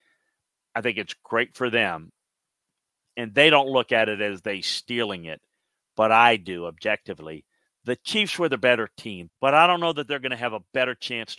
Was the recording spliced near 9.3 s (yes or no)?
yes